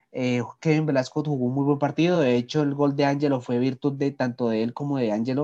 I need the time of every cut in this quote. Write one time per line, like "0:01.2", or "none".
none